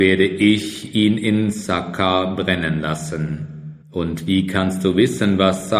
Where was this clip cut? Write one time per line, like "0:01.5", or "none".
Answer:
0:03.8